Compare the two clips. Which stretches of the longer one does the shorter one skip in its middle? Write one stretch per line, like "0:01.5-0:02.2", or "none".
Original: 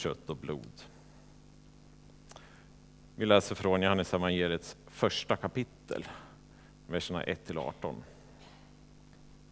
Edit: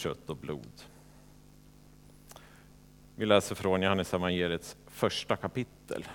none

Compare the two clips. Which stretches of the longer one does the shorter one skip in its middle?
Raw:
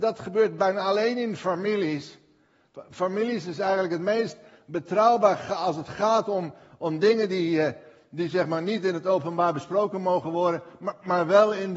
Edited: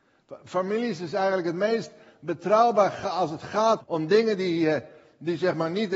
0:06.2-0:06.7

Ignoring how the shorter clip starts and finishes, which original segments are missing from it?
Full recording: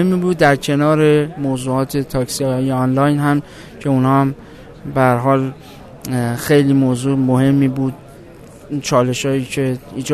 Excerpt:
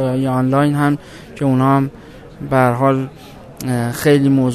none

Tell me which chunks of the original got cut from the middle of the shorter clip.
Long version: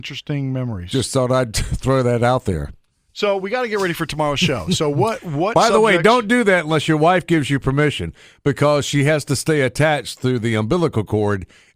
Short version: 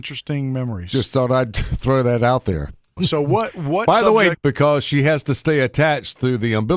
0:03.0-0:04.6
0:06.0-0:08.4

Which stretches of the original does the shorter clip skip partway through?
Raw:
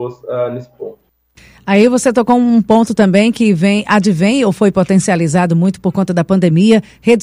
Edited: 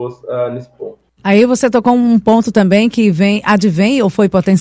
0:01.2-0:01.6

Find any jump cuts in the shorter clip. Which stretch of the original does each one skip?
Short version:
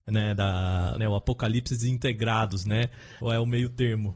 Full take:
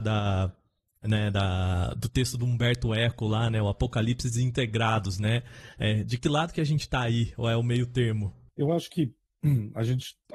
0:01.9-0:03.5
0:05.7-0:07.3

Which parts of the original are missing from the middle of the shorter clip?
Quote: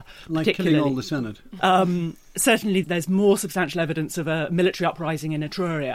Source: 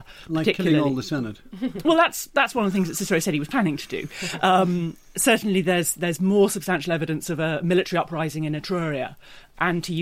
0:01.6-0:04.4
0:05.6-0:06.0

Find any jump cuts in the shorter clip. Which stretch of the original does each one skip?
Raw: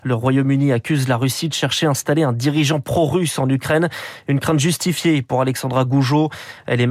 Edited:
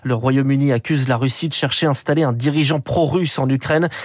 none

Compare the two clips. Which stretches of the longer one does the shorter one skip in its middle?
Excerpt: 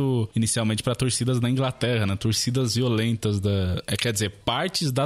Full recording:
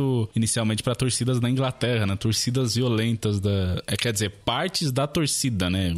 none

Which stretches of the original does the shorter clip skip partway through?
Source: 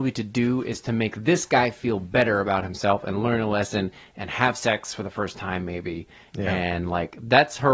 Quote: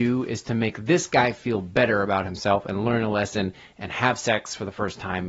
none

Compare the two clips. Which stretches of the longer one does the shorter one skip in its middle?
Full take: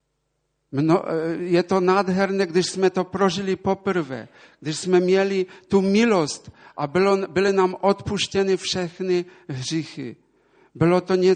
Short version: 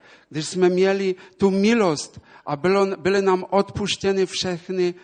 none

